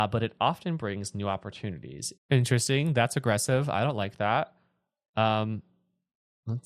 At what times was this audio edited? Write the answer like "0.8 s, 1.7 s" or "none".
2.2 s